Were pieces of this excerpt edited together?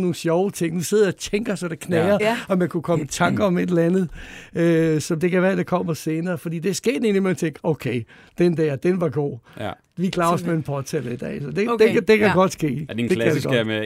no; 0 cuts

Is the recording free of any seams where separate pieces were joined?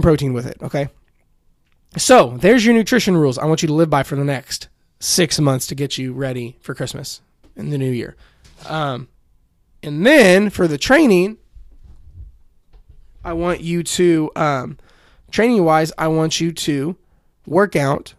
yes; 0 cuts

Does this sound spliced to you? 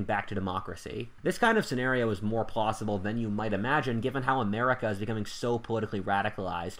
yes; 1 cut; at 1.2 s

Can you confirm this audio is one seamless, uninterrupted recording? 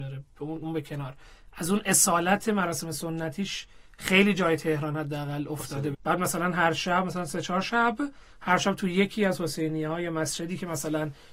no; 1 cut; at 5.9 s

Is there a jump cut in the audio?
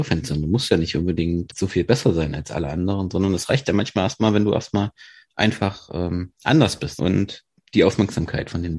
yes; 1 cut; at 7.0 s

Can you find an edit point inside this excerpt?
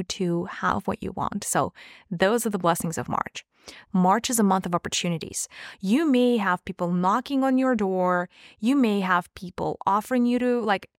yes; 1 cut; at 3.9 s

